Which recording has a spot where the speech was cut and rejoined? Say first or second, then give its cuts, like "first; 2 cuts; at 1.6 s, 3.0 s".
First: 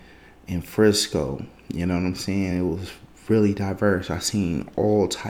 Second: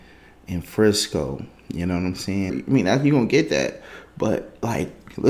second; 1 cut; at 2.5 s